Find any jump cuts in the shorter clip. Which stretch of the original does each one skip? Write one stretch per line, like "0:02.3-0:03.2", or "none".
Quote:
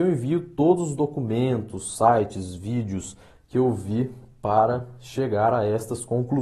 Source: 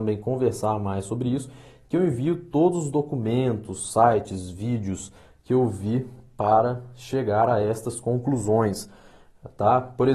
none